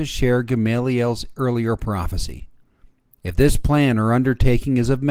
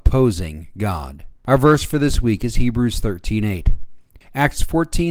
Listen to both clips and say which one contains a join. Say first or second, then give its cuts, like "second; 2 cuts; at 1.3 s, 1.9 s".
second; 1 cut; at 4.2 s